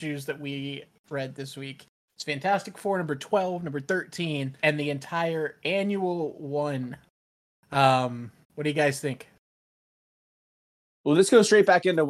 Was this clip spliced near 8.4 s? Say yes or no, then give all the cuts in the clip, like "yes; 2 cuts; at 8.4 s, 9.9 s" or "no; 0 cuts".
yes; 2 cuts; at 4.6 s, 8.4 s